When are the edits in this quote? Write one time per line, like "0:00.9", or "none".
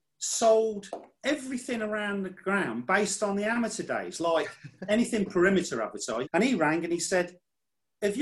0:06.2